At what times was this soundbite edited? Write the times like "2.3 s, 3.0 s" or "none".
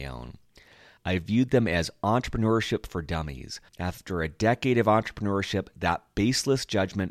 1.0 s, 3.7 s